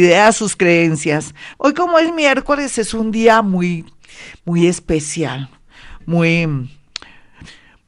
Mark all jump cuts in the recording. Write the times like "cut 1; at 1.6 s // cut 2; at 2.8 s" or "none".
cut 1; at 1.5 s

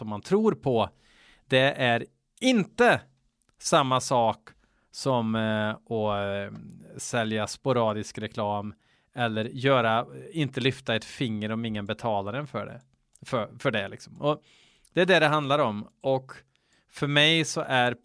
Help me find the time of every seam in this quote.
none

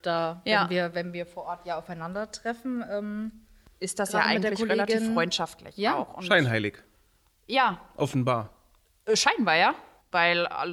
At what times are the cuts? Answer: none

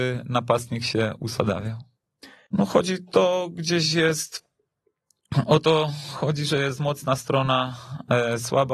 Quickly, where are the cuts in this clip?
cut 1; at 2.5 s

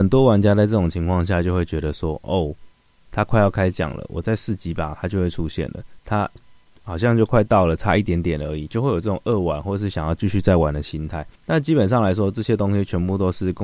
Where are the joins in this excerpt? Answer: cut 1; at 6.4 s // cut 2; at 7.8 s // cut 3; at 11.4 s

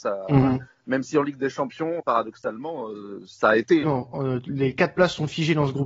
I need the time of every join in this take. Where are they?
cut 1; at 2.0 s // cut 2; at 3.8 s

